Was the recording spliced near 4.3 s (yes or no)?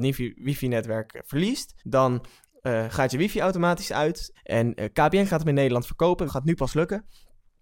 yes